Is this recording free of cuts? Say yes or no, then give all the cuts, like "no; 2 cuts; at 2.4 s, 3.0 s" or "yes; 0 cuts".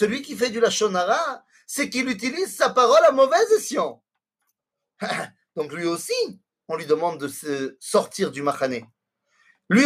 no; 1 cut; at 4.6 s